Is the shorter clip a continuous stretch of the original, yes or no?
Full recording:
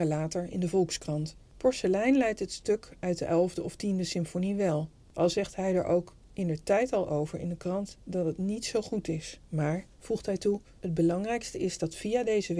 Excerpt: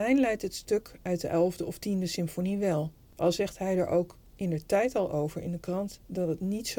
yes